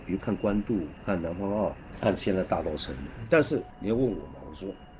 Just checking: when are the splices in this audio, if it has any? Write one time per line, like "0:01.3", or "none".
0:03.3